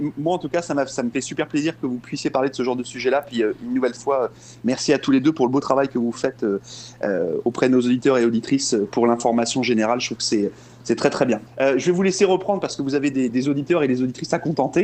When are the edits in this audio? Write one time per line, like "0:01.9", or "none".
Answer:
0:11.5